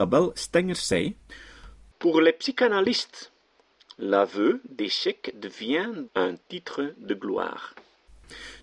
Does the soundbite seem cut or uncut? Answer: cut